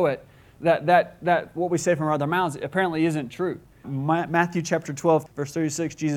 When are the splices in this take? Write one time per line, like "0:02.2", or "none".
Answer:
0:03.8
0:05.3